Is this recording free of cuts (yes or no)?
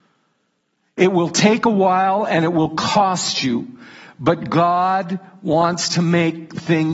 yes